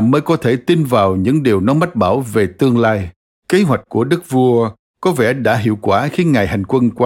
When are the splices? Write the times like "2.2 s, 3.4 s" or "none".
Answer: 3.3 s